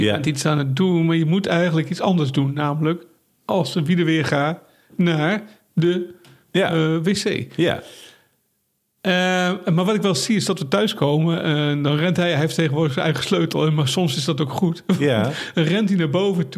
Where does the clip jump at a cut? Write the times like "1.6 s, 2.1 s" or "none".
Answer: none